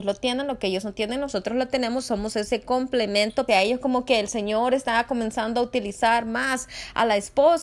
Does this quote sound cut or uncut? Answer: cut